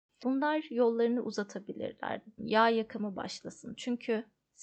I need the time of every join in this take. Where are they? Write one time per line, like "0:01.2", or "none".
0:02.4